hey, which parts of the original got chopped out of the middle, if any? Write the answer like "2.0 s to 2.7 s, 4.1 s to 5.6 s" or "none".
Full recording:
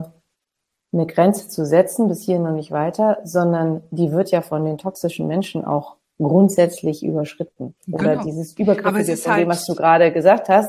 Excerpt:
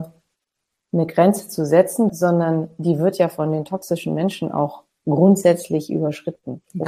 2.1 s to 3.2 s